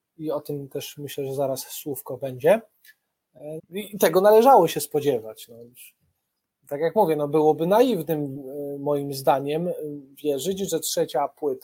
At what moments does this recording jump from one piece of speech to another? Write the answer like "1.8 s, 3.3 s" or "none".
3.6 s

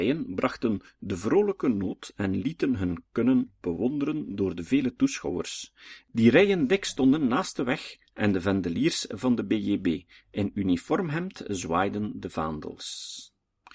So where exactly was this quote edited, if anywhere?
none

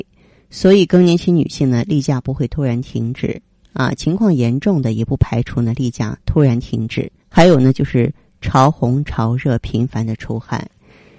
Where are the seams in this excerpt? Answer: 7.2 s

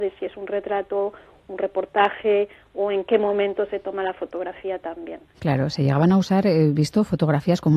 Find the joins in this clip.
5.4 s

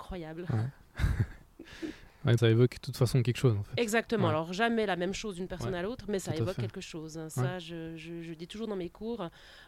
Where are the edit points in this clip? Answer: 2.4 s

